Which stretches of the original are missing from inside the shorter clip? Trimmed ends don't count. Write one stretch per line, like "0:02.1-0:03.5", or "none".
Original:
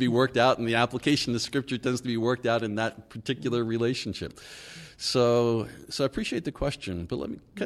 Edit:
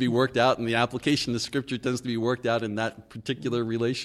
none